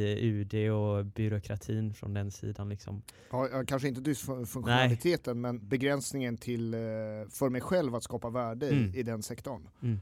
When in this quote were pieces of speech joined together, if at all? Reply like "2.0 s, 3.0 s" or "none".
5.6 s